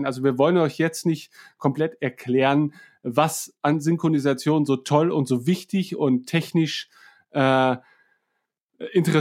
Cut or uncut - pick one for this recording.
uncut